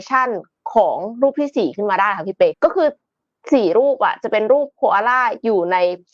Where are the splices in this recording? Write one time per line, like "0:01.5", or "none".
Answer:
0:02.5

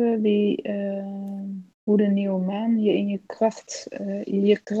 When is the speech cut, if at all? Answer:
none

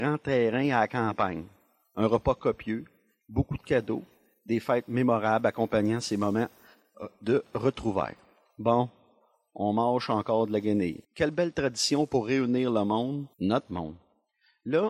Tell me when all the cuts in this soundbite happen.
0:11.0
0:13.3

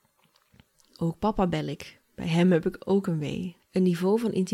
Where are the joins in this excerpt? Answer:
0:03.6

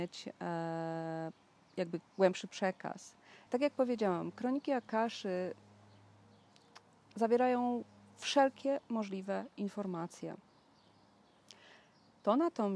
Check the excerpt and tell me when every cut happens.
0:02.0
0:03.5

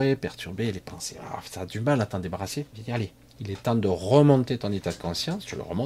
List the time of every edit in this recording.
none

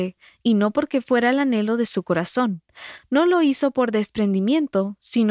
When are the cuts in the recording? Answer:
none

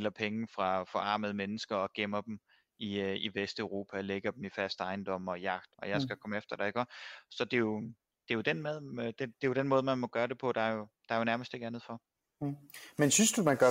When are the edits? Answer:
0:05.7

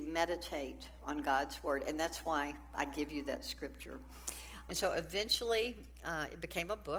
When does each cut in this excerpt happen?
0:04.7

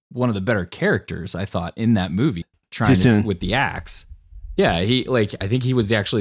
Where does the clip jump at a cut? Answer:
0:02.4

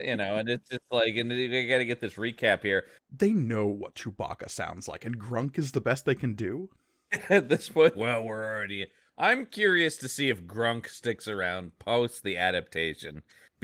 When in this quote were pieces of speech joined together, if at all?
0:03.0
0:07.9

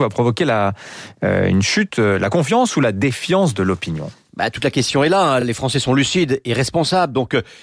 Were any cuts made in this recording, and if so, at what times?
none

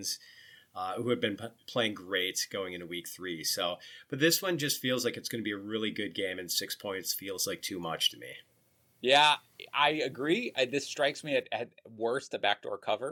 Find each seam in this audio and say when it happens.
none

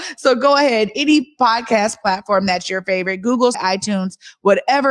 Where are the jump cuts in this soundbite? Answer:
0:03.5

